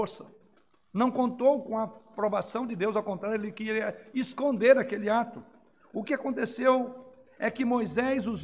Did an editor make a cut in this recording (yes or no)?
no